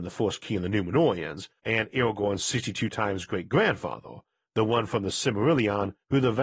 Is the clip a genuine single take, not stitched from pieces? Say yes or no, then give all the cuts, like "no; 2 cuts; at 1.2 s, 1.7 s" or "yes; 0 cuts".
yes; 0 cuts